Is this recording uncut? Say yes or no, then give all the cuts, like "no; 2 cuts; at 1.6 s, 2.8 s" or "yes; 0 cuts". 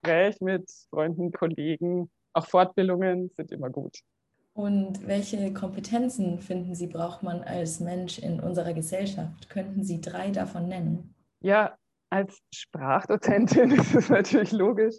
no; 1 cut; at 1.3 s